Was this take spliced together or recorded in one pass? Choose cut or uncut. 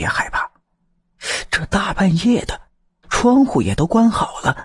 cut